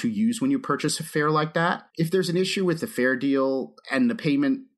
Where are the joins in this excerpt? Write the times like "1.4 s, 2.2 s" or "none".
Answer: 1.9 s, 3.8 s